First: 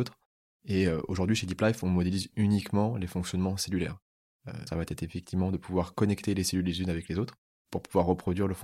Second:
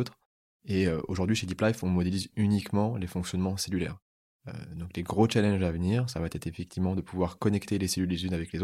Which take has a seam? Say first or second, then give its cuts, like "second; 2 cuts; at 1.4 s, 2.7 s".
first; 1 cut; at 4.7 s